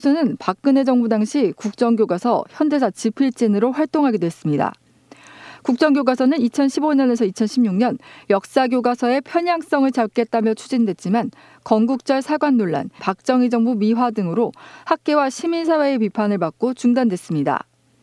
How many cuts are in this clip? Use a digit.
1